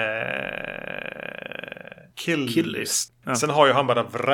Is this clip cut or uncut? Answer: cut